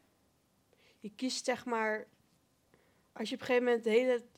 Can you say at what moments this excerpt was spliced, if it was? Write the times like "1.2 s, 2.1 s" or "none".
none